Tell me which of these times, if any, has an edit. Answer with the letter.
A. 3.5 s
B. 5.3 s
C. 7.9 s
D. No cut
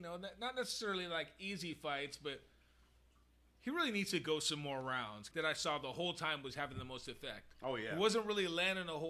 B